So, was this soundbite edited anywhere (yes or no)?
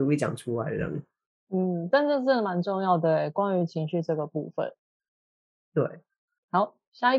no